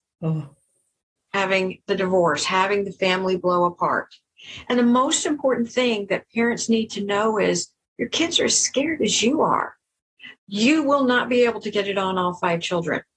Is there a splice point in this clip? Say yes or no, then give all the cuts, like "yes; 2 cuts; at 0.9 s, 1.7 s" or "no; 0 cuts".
yes; 1 cut; at 10.3 s